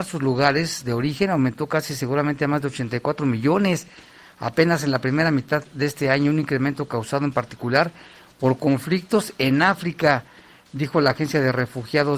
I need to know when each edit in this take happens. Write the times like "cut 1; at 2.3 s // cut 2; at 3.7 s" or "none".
none

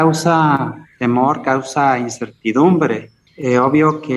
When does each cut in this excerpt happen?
cut 1; at 3.3 s

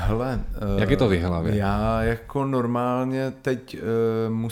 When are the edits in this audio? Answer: none

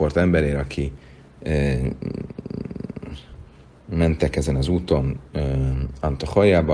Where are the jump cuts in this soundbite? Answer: none

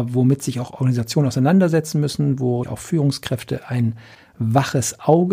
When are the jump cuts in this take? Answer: cut 1; at 2.6 s

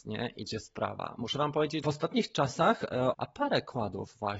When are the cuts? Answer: cut 1; at 1.8 s // cut 2; at 3.1 s

